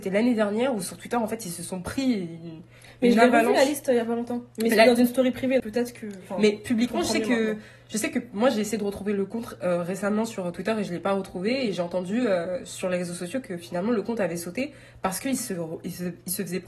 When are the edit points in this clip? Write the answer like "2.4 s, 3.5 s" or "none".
5.6 s